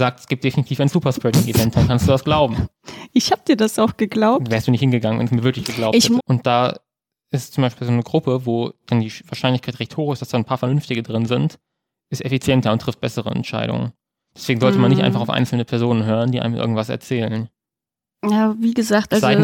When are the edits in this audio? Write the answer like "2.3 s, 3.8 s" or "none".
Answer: 6.2 s